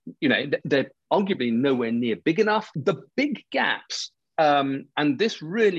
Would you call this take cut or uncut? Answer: cut